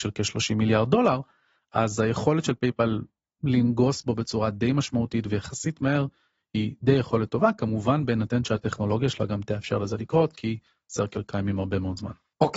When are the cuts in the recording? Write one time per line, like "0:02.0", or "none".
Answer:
none